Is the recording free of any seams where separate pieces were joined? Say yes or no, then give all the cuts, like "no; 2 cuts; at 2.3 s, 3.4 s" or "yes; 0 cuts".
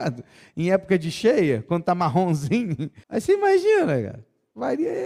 no; 1 cut; at 3.0 s